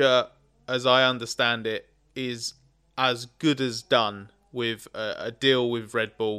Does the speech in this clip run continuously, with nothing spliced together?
yes; 0 cuts

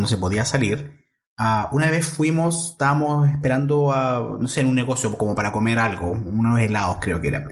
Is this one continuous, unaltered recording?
yes; 0 cuts

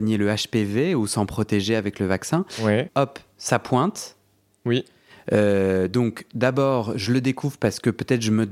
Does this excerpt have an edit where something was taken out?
yes; 1 cut; at 2.9 s

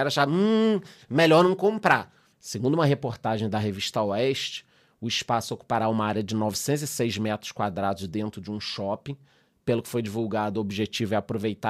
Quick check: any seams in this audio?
yes; 1 cut; at 2.3 s

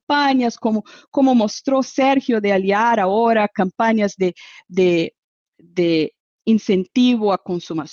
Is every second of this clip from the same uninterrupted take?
yes; 0 cuts

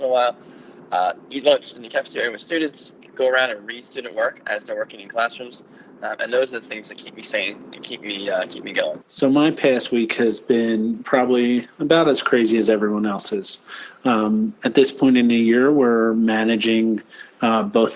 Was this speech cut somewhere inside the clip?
yes; 1 cut; at 9.0 s

